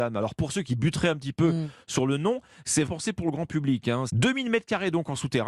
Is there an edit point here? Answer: yes; 2 cuts; at 2.9 s, 4.1 s

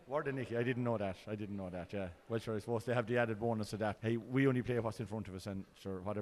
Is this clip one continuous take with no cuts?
no; 1 cut; at 4.0 s

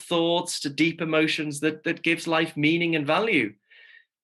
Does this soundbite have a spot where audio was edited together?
no; 0 cuts

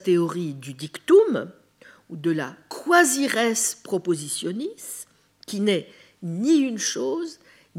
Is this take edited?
no; 0 cuts

